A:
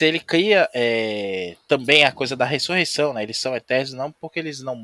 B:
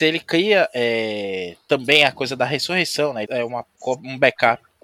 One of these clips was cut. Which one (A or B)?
B